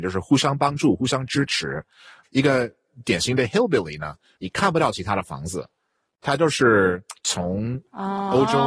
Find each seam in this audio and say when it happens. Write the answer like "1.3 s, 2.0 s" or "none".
2.2 s, 4.4 s, 7.2 s